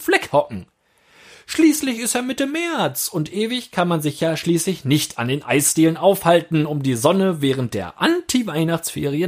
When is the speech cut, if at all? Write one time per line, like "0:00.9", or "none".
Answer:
none